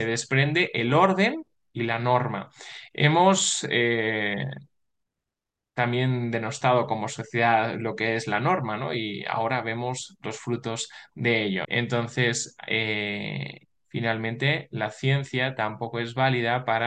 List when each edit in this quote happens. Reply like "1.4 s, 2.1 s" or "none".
11.6 s, 13.8 s